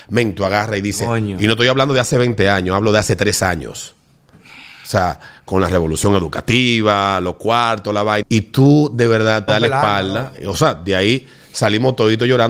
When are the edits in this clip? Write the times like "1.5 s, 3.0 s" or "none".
8.2 s, 9.5 s